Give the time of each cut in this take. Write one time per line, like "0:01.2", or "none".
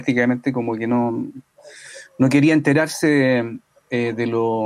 none